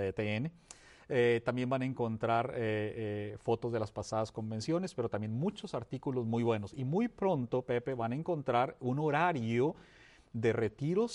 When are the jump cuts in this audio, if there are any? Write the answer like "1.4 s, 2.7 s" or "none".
none